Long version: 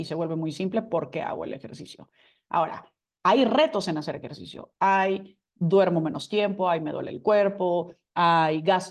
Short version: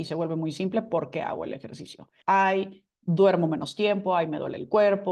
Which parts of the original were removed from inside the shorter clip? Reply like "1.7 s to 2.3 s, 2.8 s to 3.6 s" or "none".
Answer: 2.2 s to 4.8 s